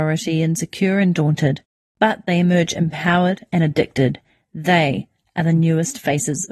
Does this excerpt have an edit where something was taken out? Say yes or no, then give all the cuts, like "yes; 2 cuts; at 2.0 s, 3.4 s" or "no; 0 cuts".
no; 0 cuts